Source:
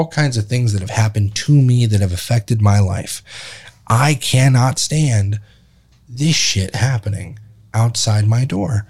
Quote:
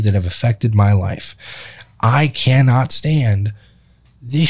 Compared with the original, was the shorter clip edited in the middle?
no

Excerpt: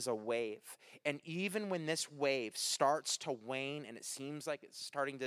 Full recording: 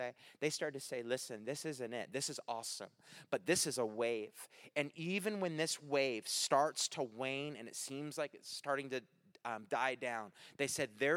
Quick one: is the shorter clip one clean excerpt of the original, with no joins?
yes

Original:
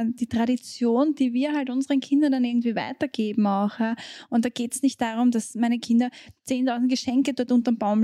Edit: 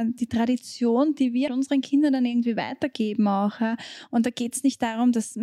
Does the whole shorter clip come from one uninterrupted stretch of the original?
no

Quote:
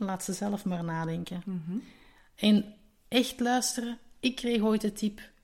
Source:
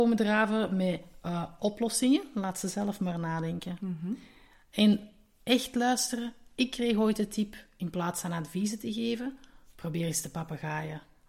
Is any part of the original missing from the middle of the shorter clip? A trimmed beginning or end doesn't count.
no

